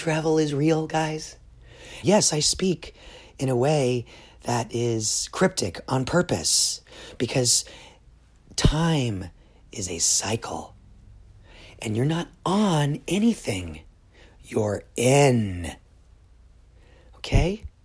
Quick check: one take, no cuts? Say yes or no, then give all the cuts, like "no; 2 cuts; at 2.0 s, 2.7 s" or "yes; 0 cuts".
no; 1 cut; at 2.0 s